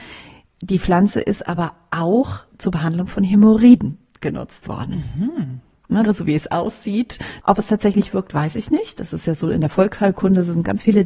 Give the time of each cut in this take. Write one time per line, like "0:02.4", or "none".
0:02.5
0:06.0
0:07.4